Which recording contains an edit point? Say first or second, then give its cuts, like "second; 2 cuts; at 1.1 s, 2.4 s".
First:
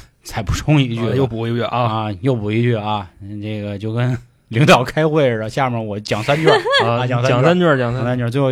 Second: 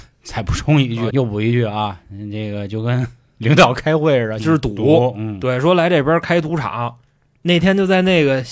second; 2 cuts; at 1.1 s, 4.4 s